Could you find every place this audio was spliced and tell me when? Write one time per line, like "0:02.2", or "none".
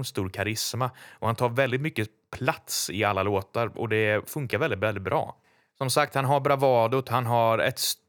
none

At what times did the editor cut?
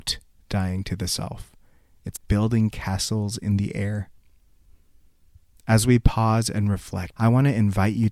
0:02.2
0:07.1

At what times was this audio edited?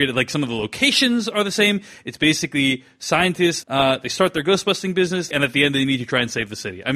0:03.6
0:05.3

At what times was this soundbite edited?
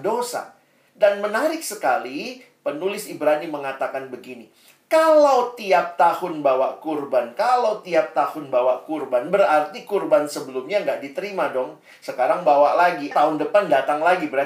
0:13.1

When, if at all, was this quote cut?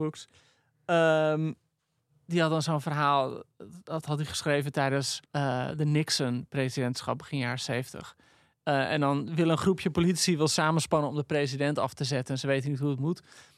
0:05.3

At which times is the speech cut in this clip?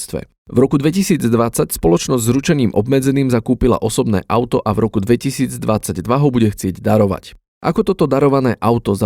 none

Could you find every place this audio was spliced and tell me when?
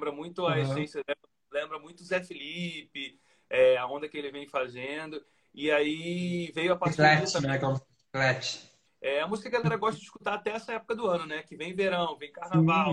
0:08.9

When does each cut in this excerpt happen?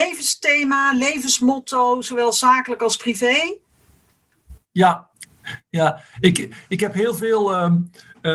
none

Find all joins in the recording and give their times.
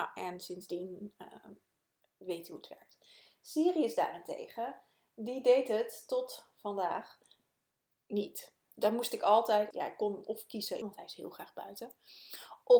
0:09.7
0:10.8

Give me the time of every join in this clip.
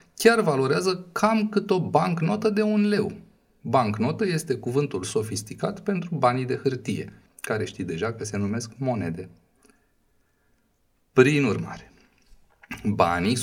0:07.3

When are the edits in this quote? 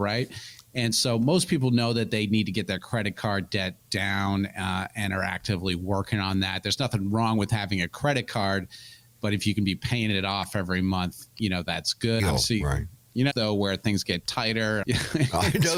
0:12.2
0:13.3
0:14.8

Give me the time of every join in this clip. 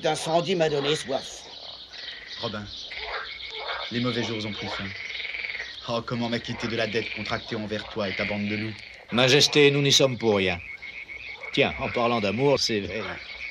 0:11.5
0:12.6

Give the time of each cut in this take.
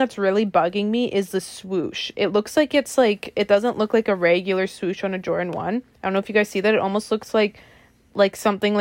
none

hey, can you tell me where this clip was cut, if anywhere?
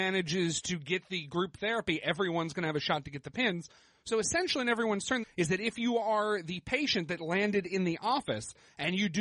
0:05.2

